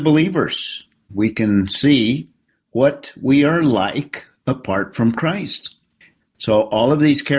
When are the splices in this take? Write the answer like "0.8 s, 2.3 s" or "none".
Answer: 1.1 s, 6.2 s